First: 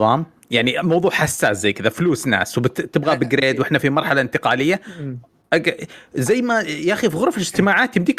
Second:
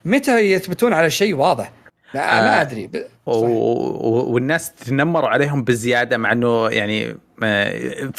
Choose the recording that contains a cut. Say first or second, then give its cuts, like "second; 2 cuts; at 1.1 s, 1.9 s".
second; 1 cut; at 3.3 s